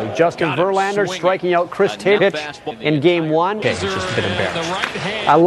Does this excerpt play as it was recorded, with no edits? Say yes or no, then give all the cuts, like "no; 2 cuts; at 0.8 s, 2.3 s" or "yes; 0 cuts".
no; 2 cuts; at 2.2 s, 3.6 s